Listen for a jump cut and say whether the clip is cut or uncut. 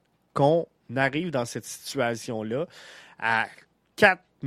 uncut